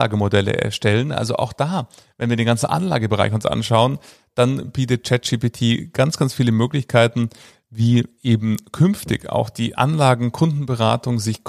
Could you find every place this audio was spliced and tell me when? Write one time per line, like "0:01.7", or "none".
none

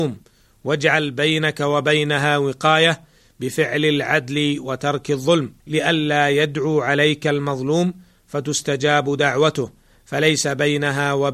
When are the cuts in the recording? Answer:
0:05.6

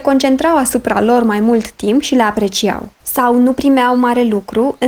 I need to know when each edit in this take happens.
0:02.9

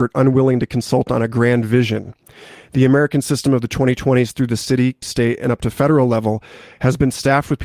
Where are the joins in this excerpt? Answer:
0:05.0

